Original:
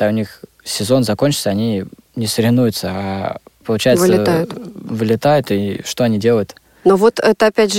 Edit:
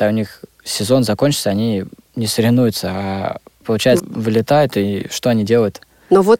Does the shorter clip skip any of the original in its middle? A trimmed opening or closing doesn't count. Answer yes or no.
yes